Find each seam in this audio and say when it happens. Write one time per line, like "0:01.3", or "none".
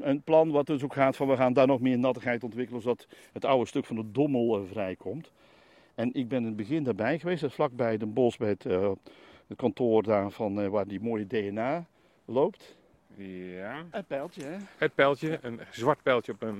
0:13.9